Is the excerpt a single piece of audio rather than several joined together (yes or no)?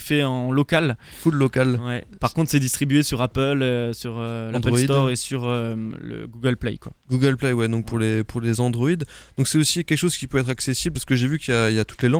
yes